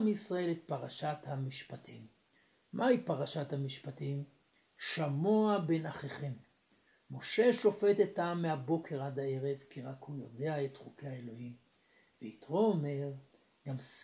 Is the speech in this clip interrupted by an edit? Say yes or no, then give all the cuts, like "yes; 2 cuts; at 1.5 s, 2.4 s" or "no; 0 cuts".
no; 0 cuts